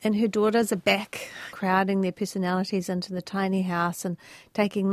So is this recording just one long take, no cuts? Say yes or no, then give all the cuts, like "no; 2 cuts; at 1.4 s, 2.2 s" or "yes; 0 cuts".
no; 1 cut; at 1.5 s